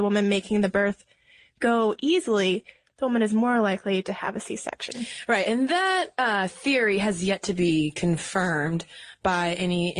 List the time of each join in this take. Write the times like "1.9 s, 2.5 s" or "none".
none

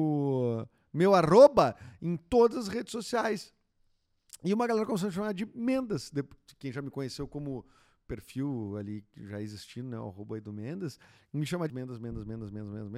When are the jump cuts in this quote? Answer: 11.7 s

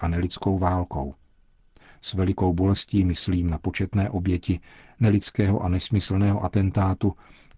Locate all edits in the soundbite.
none

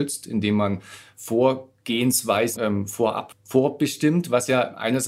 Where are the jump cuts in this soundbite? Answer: 2.6 s

